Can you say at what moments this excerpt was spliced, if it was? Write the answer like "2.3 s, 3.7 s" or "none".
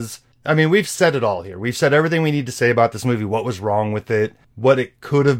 none